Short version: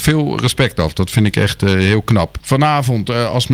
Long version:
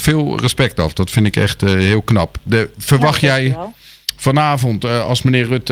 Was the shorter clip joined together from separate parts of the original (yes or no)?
yes